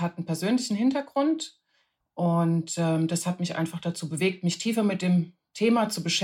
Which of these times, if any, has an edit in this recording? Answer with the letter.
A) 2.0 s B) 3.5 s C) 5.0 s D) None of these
A